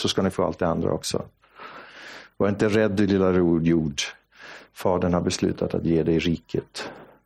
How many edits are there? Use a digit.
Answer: 0